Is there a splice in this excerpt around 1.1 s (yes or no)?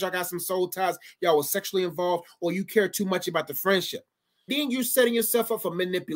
no